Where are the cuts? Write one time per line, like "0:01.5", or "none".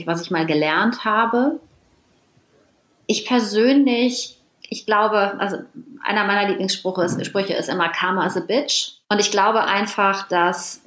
0:09.0